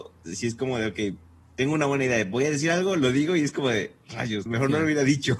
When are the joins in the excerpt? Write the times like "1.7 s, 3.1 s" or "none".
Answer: 4.5 s